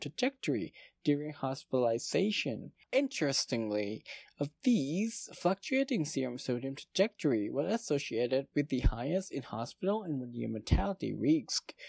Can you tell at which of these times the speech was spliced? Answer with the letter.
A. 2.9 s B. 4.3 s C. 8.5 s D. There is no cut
A